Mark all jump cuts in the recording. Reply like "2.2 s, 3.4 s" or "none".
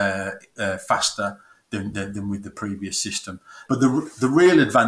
3.6 s

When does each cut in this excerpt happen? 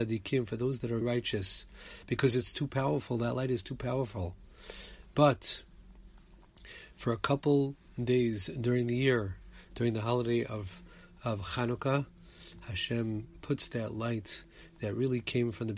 1.0 s

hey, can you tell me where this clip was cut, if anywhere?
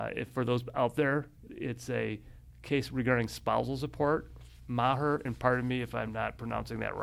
1.5 s, 5.2 s

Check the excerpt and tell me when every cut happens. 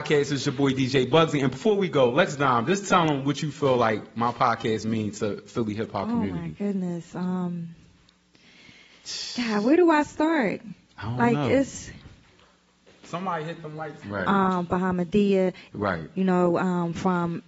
14.0 s, 15.7 s

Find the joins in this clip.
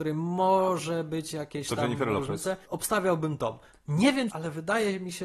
2.6 s, 4.3 s

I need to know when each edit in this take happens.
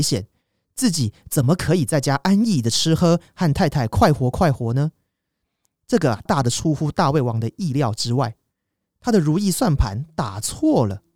6.3 s

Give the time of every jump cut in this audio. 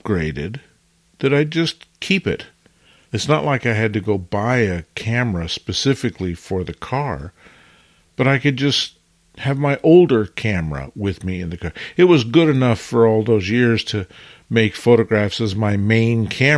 none

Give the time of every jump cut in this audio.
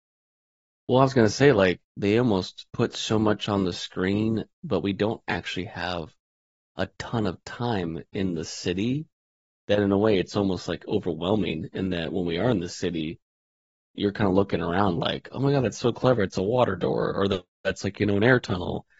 2.7 s

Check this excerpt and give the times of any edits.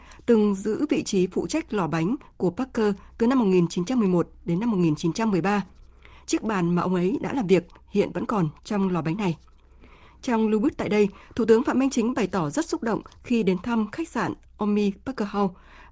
none

